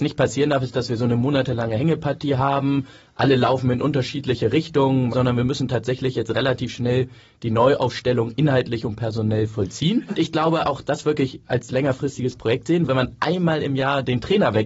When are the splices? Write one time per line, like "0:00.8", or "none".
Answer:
0:05.1
0:10.1
0:12.9